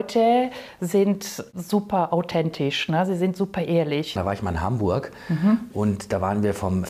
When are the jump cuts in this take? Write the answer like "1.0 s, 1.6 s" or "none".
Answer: 4.2 s